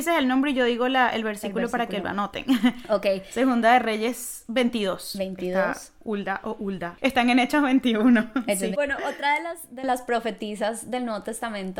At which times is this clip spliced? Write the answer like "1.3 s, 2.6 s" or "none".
7.0 s, 8.7 s